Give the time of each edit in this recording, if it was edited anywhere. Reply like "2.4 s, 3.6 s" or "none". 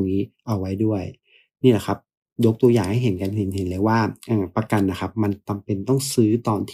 none